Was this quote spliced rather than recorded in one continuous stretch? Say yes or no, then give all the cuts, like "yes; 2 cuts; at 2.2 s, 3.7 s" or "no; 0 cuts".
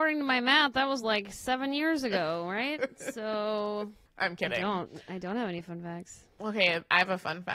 no; 0 cuts